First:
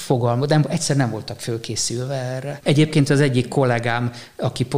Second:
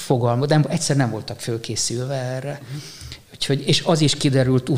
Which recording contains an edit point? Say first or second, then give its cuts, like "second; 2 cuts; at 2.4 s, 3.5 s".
first; 1 cut; at 2.6 s